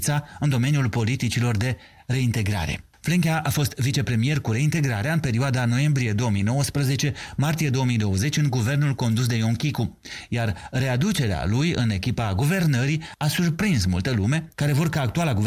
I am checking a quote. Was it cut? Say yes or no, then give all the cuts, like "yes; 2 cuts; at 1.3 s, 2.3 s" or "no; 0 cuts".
yes; 1 cut; at 14.5 s